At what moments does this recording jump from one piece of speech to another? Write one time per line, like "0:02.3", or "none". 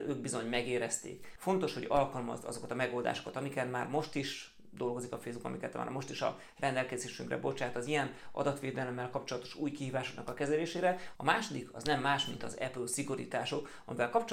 0:01.4
0:11.2